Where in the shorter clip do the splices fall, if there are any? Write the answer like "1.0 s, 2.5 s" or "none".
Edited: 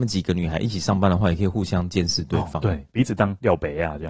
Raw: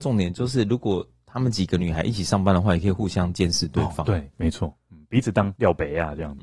2.9 s